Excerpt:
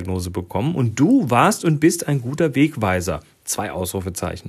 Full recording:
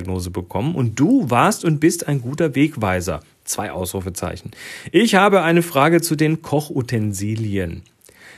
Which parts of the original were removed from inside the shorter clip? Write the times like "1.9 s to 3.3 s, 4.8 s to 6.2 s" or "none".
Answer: none